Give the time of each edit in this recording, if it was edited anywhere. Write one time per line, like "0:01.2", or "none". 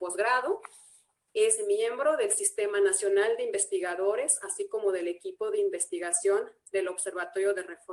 none